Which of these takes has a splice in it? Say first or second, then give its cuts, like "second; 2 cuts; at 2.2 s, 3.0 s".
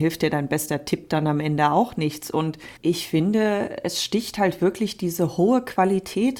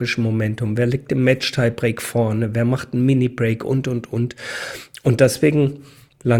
first; 1 cut; at 2.8 s